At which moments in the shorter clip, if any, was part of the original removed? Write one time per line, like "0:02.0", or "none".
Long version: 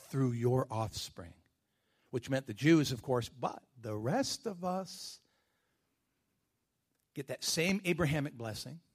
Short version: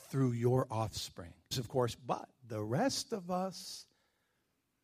0:01.5